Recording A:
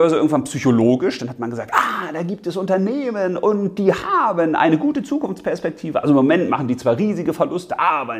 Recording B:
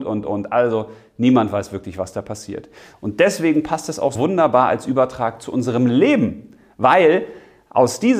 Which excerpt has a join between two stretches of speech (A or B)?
B